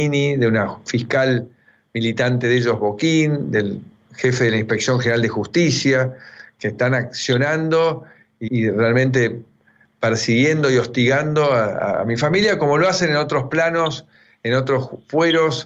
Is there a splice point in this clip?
yes; 1 cut; at 8.5 s

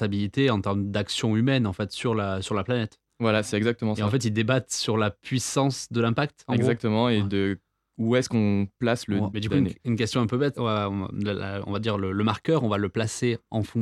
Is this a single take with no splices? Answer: no; 2 cuts; at 9.3 s, 10.5 s

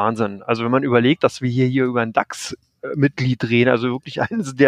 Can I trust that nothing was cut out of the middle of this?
yes; 0 cuts

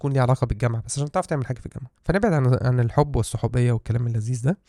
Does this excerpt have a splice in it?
yes; 1 cut; at 1.9 s

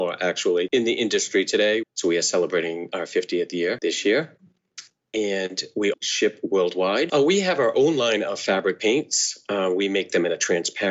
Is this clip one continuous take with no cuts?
no; 2 cuts; at 1.8 s, 5.9 s

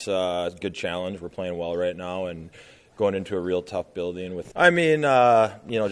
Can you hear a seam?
yes; 1 cut; at 4.5 s

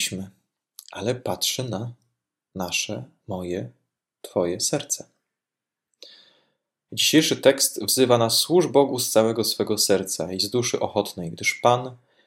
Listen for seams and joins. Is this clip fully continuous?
no; 1 cut; at 6.9 s

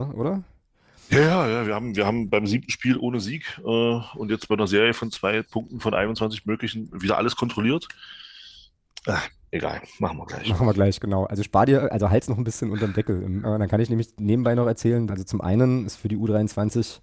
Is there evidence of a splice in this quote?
yes; 2 cuts; at 13.4 s, 15.1 s

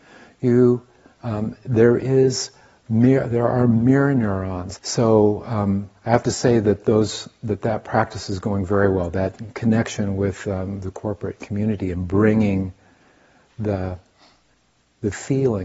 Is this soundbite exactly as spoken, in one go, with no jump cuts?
no; 1 cut; at 4.8 s

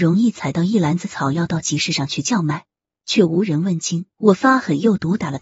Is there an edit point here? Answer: yes; 1 cut; at 4.1 s

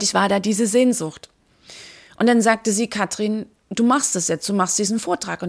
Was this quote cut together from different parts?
yes; 1 cut; at 3.6 s

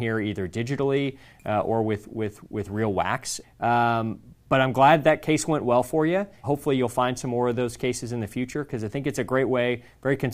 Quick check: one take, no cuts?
no; 2 cuts; at 3.4 s, 6.4 s

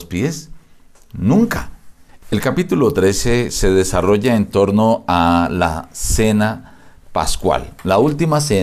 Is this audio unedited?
no; 1 cut; at 2.1 s

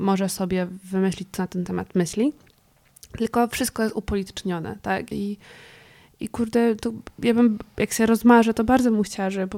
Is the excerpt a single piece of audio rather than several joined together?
no; 1 cut; at 5.1 s

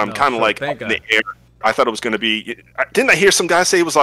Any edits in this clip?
yes; 1 cut; at 1.6 s

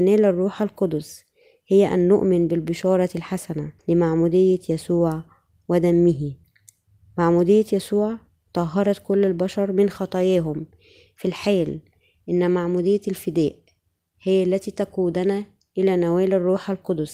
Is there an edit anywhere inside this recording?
yes; 1 cut; at 3.8 s

